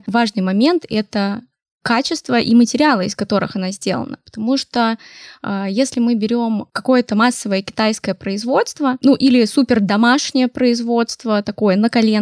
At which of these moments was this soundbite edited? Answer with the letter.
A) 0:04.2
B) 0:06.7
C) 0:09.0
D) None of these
D